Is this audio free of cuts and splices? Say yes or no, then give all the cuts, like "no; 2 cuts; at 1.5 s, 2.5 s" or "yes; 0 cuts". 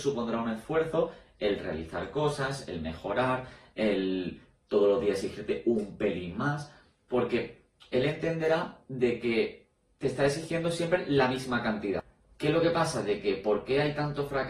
yes; 0 cuts